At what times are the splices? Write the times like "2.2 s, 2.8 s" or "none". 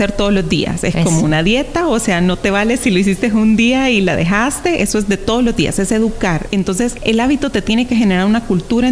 none